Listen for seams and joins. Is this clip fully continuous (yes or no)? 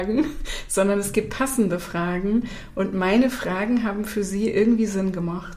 yes